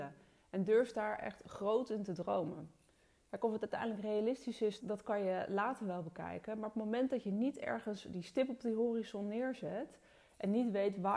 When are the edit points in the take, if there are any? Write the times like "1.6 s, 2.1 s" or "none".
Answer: 4.8 s